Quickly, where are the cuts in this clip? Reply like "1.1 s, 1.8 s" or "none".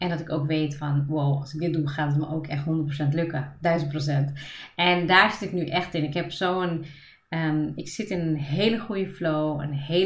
none